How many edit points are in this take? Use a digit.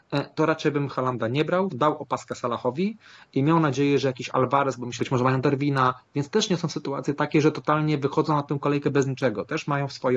2